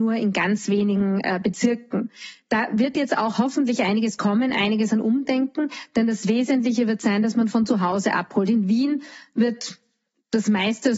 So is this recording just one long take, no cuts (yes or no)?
yes